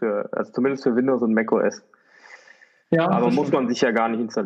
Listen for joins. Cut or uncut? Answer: uncut